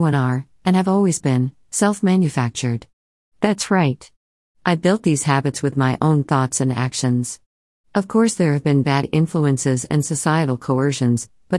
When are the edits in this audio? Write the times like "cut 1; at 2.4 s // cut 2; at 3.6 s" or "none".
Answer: none